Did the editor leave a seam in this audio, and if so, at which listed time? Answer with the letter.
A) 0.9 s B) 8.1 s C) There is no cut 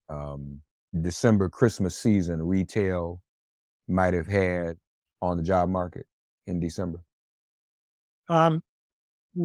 A